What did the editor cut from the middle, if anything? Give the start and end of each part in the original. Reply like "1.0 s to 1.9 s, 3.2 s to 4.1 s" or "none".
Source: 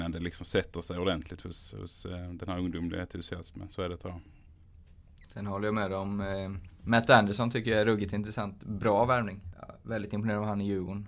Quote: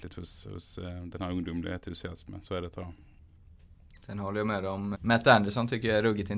6.2 s to 6.8 s